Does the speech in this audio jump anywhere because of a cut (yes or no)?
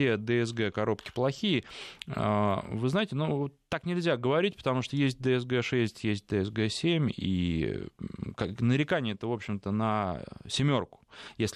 no